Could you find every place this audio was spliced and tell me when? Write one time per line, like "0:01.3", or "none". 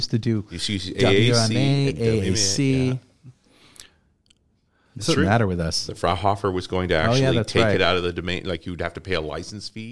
0:05.9